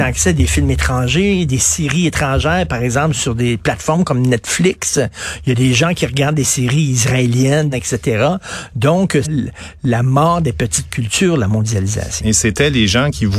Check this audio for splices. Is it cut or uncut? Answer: cut